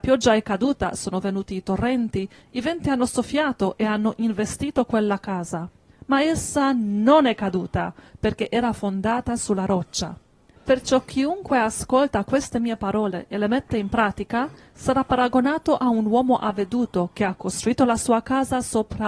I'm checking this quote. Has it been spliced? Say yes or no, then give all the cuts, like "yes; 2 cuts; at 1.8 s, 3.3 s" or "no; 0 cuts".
yes; 1 cut; at 10.6 s